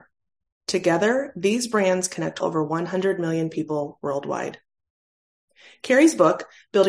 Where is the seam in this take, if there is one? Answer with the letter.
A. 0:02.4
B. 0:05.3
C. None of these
A